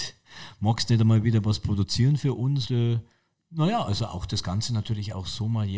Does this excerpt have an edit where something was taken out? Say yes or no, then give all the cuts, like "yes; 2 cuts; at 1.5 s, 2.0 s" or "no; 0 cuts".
yes; 1 cut; at 2.6 s